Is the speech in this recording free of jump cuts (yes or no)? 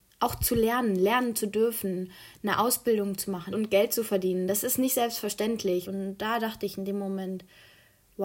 no